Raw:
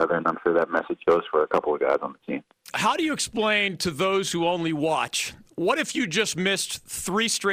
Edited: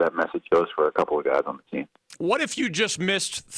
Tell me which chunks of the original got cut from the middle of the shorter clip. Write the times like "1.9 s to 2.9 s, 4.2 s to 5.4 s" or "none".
2.7 s to 5.5 s